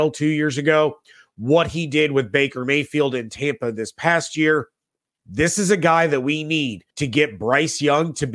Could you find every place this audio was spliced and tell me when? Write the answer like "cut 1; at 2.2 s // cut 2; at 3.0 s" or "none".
cut 1; at 5.2 s // cut 2; at 6.9 s